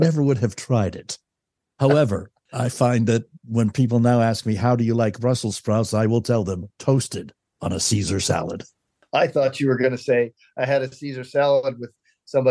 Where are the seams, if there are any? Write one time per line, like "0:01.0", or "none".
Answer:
none